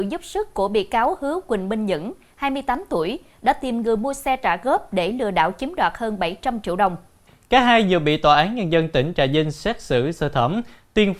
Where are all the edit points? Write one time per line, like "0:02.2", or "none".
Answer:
none

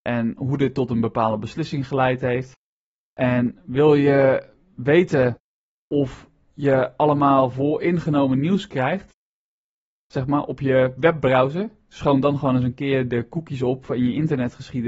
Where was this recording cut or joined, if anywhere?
none

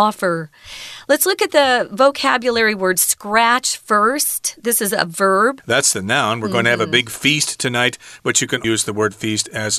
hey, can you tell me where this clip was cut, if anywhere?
0:05.6
0:08.6

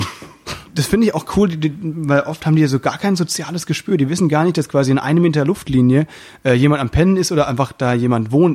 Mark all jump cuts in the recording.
none

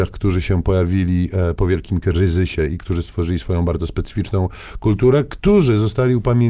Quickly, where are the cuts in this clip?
none

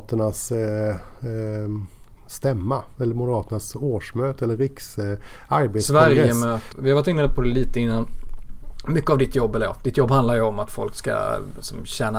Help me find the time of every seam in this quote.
0:06.7

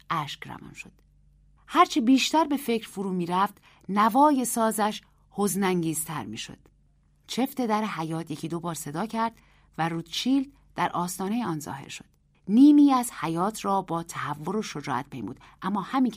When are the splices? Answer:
none

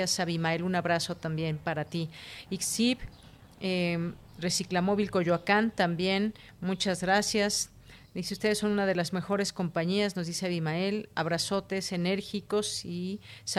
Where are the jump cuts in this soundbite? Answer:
0:02.5

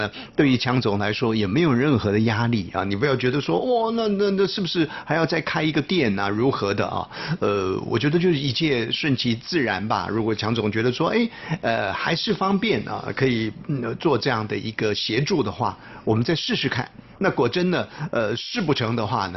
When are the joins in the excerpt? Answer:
none

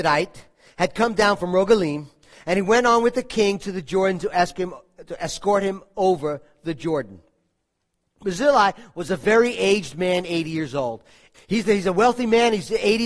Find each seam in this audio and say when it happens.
0:11.3

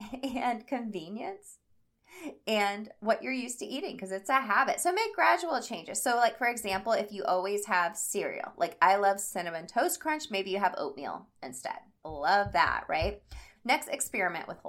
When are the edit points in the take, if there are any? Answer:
0:12.0
0:13.5

